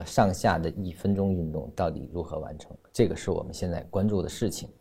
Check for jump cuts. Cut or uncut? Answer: cut